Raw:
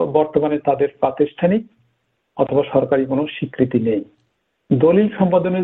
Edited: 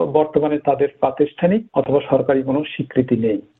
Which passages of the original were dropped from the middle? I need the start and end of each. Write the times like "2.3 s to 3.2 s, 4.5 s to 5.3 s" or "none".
1.7 s to 2.3 s